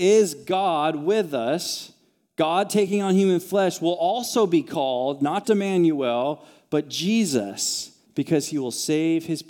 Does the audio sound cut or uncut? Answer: cut